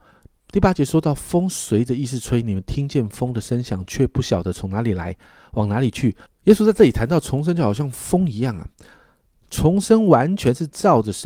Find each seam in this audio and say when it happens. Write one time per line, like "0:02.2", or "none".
0:06.3